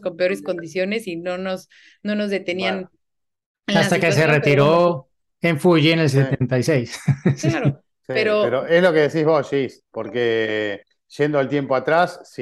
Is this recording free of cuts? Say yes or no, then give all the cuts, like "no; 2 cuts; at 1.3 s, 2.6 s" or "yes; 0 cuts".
yes; 0 cuts